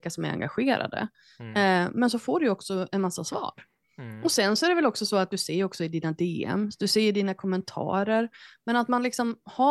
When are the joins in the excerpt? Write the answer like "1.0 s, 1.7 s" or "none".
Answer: none

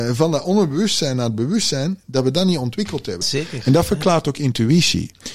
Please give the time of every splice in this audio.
3.2 s

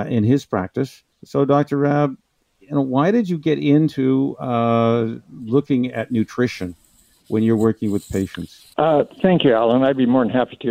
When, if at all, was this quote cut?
1.1 s, 8.7 s

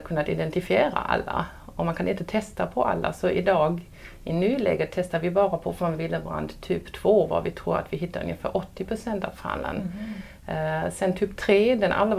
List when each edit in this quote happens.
none

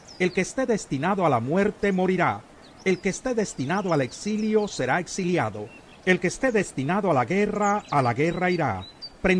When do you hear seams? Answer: none

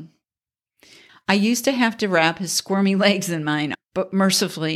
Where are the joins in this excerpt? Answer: 1.1 s, 3.7 s

